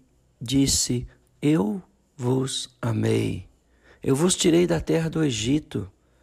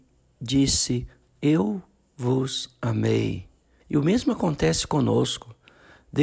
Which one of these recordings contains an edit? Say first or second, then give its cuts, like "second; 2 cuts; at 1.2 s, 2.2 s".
second; 1 cut; at 3.8 s